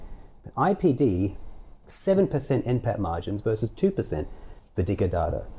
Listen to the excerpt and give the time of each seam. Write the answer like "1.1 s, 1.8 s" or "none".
1.8 s